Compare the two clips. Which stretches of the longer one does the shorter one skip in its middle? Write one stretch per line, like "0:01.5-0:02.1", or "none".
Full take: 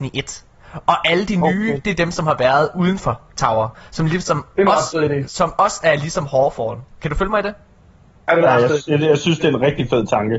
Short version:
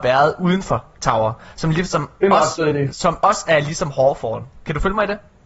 none

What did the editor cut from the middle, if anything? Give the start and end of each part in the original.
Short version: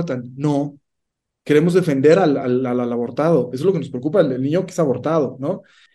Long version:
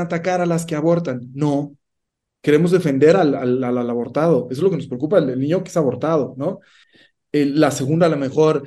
none

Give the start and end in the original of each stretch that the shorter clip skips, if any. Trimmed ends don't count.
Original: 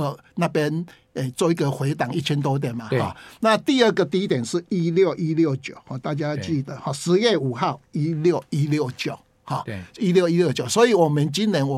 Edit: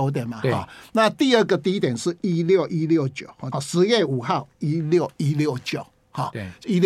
0:06.0-0:06.8

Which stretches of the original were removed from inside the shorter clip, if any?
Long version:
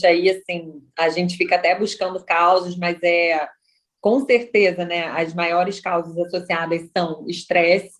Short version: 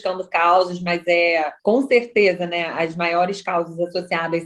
0:03.5-0:04.0

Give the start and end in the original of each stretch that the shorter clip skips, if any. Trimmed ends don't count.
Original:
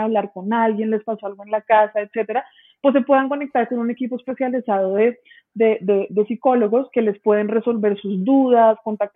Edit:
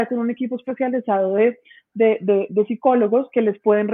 none

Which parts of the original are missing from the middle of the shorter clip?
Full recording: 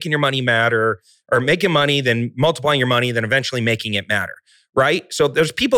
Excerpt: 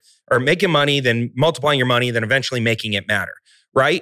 none

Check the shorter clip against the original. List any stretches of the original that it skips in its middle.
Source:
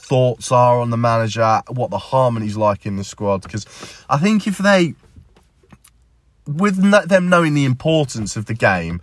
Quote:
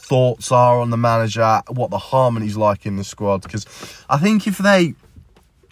none

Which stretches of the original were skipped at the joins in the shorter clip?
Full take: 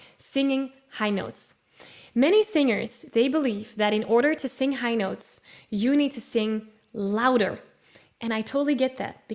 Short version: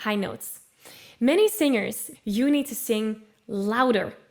0:03.1-0:05.6

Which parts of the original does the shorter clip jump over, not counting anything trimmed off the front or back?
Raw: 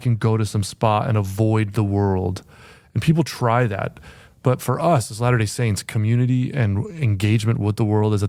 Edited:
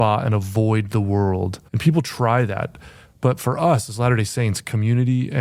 0:02.5-0:02.9

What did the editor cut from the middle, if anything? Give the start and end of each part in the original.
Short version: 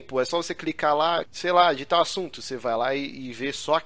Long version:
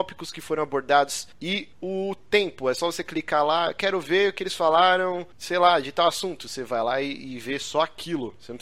0:03.7-0:05.3

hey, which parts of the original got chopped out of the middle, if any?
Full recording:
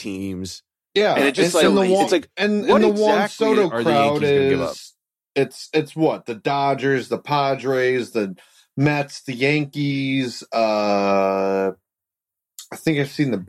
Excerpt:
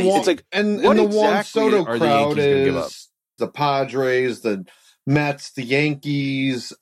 0:05.2-0:07.1

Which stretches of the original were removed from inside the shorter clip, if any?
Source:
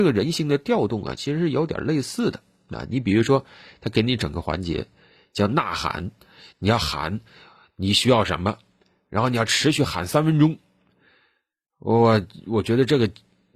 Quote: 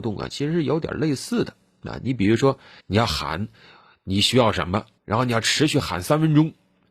0:03.7-0:06.5
0:08.7-0:09.0

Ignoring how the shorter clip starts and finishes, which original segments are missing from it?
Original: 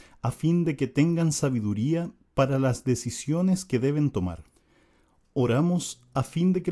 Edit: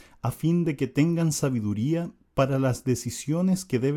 none

